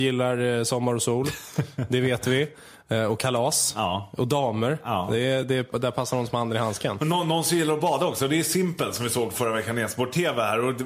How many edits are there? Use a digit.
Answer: 0